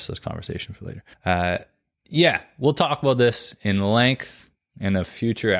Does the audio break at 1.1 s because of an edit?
yes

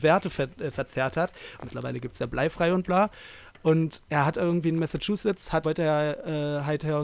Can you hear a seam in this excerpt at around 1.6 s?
yes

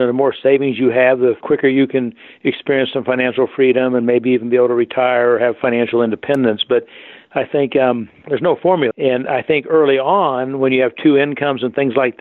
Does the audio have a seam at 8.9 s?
yes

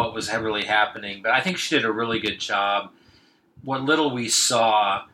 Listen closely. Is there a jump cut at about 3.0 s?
no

